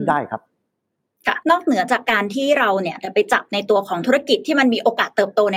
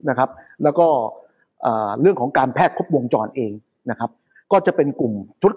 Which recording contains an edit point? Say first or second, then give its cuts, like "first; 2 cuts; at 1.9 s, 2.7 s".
first; 1 cut; at 1.4 s